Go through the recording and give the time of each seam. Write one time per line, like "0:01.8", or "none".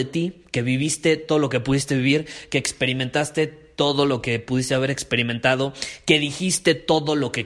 none

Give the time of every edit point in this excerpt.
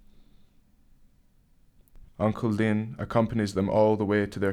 0:02.1

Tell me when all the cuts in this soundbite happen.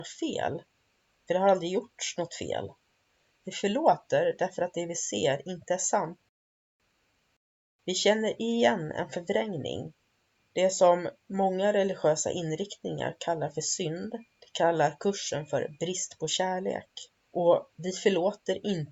0:10.4
0:14.3
0:17.2

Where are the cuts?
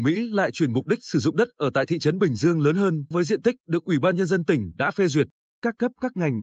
0:03.1

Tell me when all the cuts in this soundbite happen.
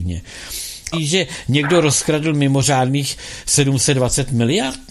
0:00.9

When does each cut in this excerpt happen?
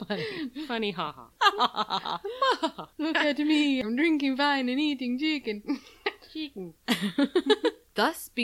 none

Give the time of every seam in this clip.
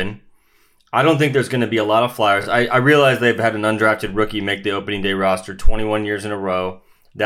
none

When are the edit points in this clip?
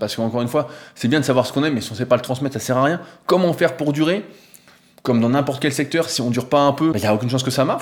0:06.9

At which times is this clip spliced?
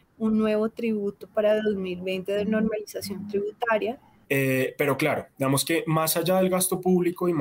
0:04.2

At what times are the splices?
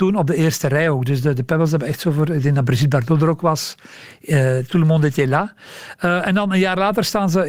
none

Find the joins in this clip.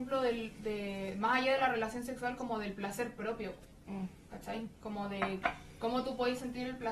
none

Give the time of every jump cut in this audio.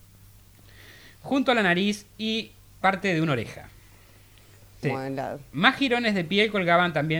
0:04.8

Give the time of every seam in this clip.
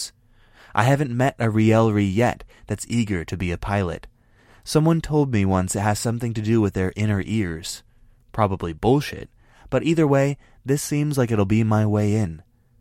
none

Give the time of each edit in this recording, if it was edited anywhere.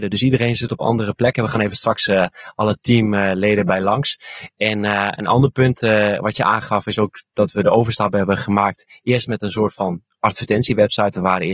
none

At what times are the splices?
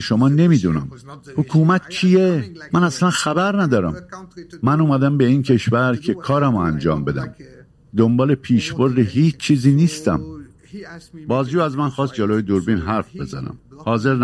0:02.7

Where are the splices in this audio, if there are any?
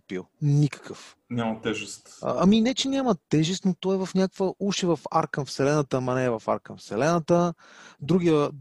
none

